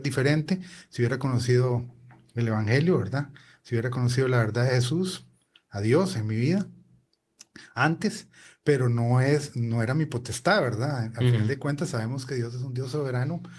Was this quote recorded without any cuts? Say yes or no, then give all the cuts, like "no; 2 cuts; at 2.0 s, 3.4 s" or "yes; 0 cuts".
yes; 0 cuts